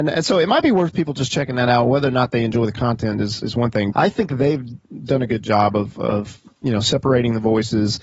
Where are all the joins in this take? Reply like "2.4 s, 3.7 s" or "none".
3.9 s